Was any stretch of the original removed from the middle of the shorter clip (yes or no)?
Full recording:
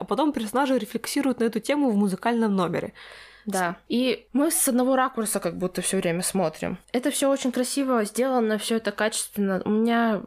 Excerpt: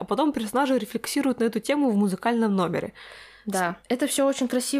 yes